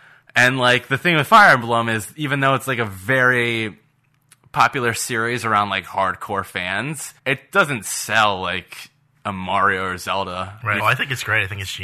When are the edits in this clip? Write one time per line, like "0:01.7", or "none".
0:07.2
0:10.8